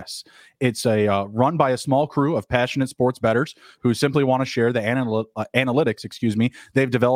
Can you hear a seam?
no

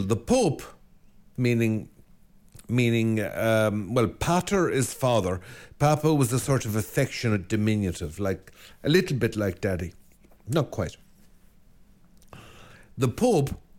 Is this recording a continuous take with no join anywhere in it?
no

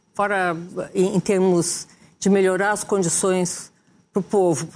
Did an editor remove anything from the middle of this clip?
no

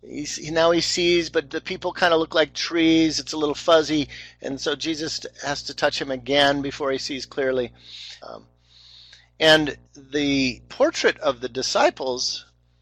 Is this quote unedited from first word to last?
no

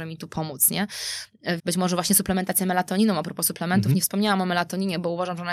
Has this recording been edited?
yes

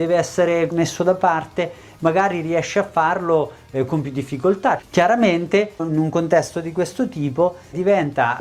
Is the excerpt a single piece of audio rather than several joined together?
no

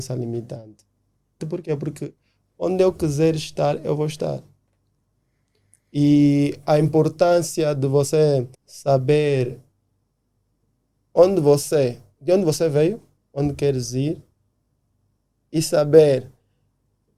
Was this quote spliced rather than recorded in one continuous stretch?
yes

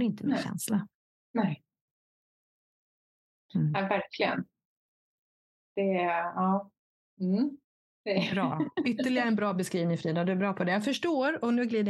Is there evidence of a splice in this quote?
no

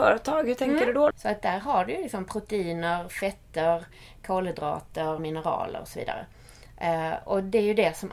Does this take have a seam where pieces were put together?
yes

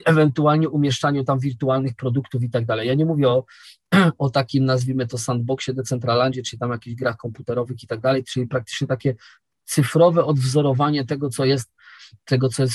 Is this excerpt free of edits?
yes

